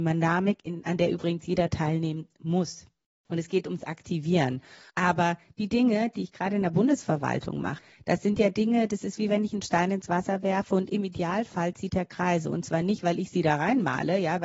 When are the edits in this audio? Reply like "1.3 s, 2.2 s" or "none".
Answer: 4.9 s